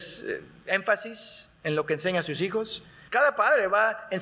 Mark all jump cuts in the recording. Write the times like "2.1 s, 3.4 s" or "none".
3.1 s